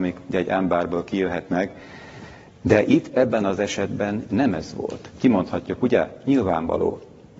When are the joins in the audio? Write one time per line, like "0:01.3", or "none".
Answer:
none